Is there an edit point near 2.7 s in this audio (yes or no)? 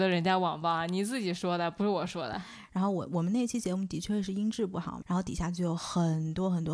yes